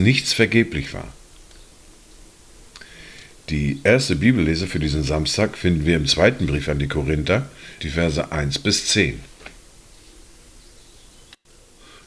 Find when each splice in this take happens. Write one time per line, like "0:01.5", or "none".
0:07.8